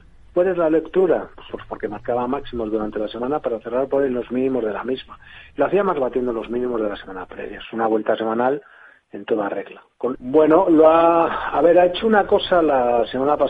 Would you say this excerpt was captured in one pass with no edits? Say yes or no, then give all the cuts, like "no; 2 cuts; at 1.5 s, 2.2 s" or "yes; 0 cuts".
no; 2 cuts; at 1.5 s, 10.1 s